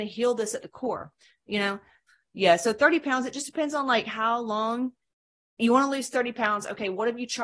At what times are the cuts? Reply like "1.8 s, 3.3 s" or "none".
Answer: none

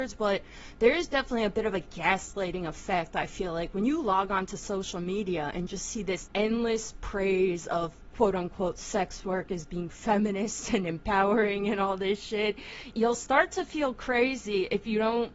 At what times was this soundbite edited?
6.3 s, 12.9 s

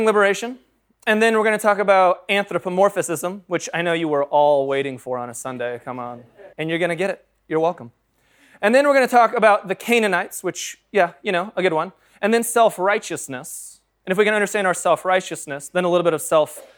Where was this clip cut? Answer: 6.5 s

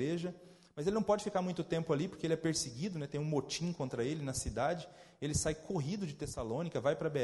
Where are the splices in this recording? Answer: none

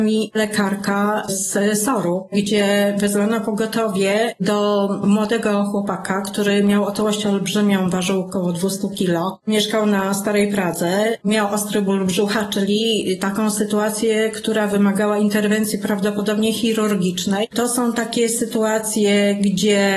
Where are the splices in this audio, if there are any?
17.5 s

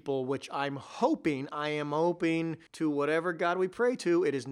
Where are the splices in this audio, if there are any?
2.7 s

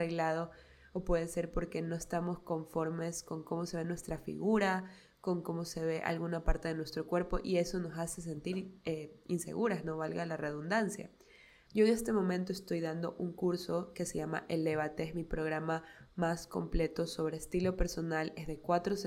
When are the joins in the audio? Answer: 11.6 s

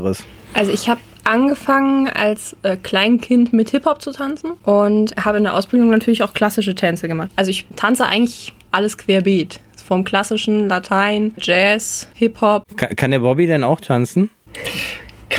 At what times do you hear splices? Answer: none

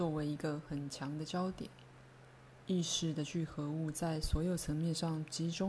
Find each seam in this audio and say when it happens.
2.6 s

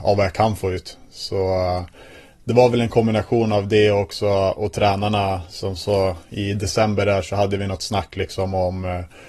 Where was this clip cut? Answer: none

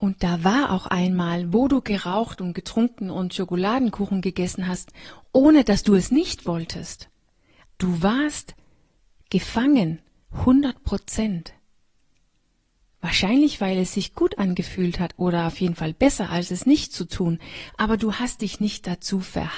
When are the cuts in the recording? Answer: 7.6 s

